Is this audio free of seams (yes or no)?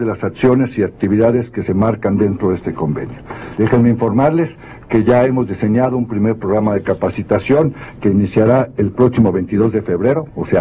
no